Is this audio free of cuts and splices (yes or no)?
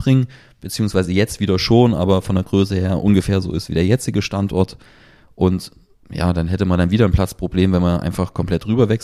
yes